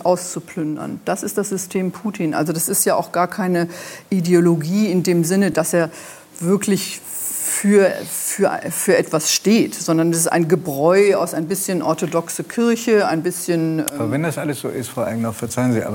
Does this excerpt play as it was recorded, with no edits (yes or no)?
yes